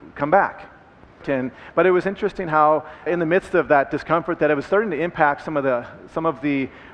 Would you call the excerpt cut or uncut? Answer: cut